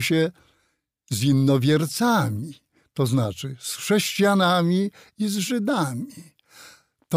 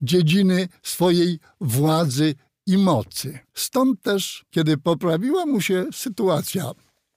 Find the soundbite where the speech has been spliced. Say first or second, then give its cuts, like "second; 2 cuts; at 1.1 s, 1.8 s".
second; 1 cut; at 3.4 s